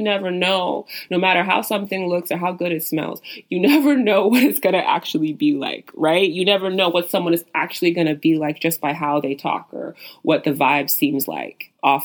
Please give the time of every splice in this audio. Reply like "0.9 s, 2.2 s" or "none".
none